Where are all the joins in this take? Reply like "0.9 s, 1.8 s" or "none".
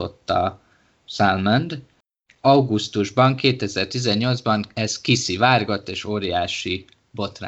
none